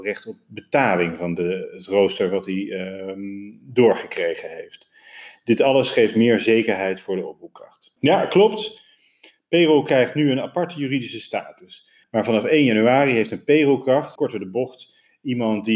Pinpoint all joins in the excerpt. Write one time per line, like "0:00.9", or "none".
0:08.0
0:12.0
0:14.2